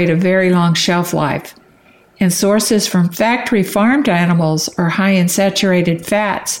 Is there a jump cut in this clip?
no; 0 cuts

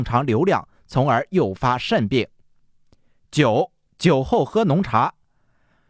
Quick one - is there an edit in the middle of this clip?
no; 0 cuts

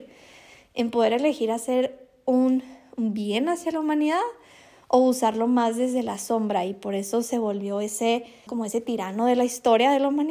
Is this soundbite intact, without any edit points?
no; 1 cut; at 8.5 s

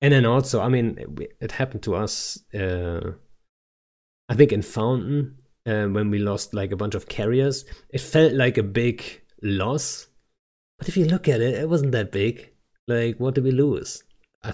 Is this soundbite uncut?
yes; 0 cuts

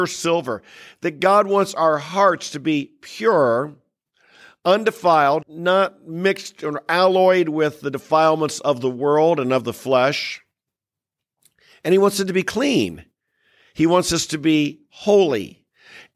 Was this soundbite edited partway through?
yes; 1 cut; at 5.4 s

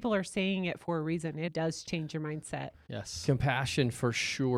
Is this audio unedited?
no; 2 cuts; at 1.5 s, 2.7 s

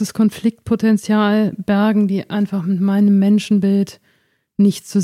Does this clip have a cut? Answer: no; 0 cuts

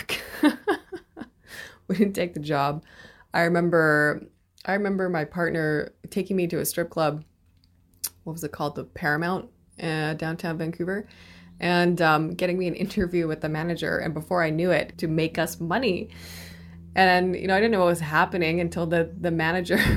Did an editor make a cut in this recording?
yes; 1 cut; at 14.9 s

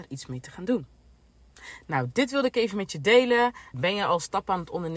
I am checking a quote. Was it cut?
yes; 1 cut; at 3.7 s

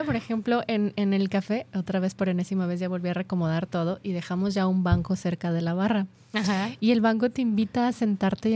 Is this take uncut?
yes; 0 cuts

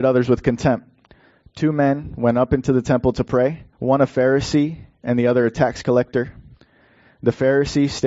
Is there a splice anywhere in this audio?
yes; 1 cut; at 3.7 s

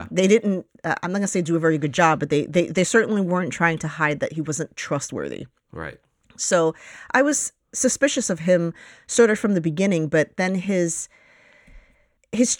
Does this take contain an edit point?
no; 0 cuts

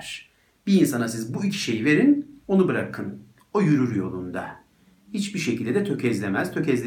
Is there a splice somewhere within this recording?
yes; 1 cut; at 2.4 s

